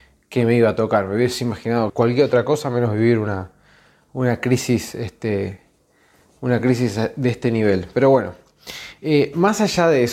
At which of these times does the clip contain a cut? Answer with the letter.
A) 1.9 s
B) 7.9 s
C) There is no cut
A